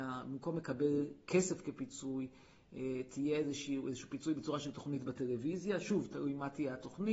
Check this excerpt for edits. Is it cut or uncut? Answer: uncut